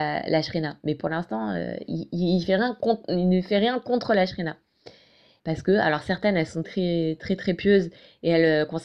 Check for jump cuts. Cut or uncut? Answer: cut